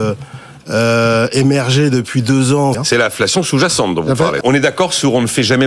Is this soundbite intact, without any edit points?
no; 2 cuts; at 2.7 s, 4.4 s

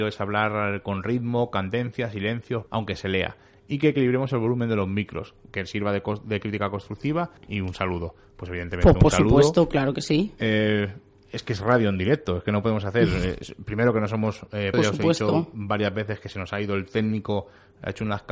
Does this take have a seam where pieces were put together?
yes; 3 cuts; at 2.7 s, 7.4 s, 14.7 s

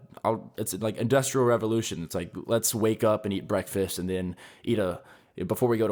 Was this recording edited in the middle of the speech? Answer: no; 0 cuts

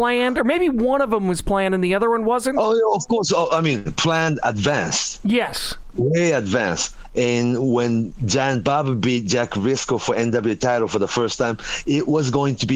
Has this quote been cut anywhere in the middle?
no; 0 cuts

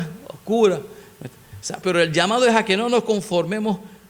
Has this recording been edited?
yes; 1 cut; at 1.8 s

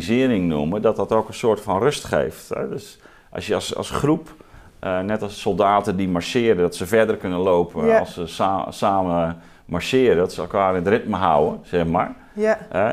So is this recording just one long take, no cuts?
yes; 0 cuts

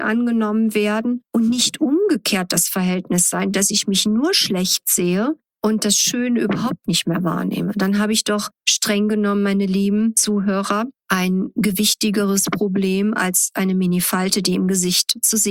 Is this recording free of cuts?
yes; 0 cuts

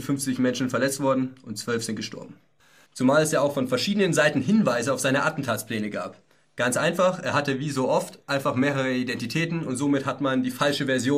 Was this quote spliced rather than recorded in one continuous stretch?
yes; 1 cut; at 2.9 s

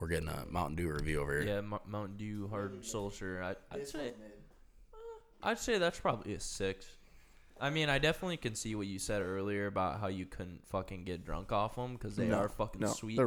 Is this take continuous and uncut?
yes; 0 cuts

